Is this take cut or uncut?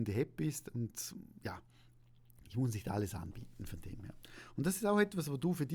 uncut